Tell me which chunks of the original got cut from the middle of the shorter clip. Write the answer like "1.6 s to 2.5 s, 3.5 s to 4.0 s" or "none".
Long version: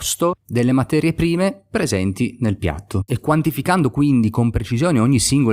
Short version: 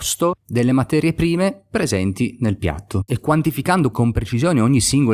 3.9 s to 4.3 s